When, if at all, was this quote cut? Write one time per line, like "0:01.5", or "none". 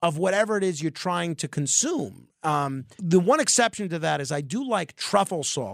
0:03.0